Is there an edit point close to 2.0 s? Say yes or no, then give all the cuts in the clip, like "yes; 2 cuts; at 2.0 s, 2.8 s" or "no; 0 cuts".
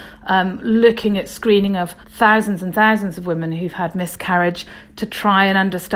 yes; 1 cut; at 2.0 s